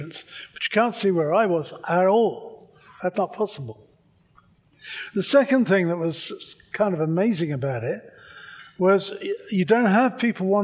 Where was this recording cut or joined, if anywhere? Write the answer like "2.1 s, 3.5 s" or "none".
3.1 s